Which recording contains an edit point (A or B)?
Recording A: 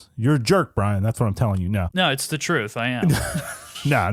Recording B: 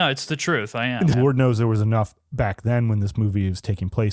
B